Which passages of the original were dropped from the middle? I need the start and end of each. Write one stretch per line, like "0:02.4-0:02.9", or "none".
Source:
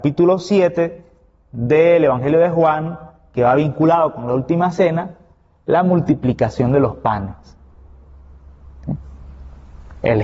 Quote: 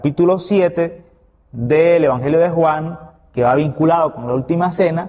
none